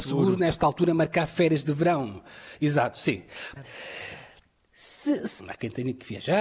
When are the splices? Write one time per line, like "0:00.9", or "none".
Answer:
0:03.6
0:05.4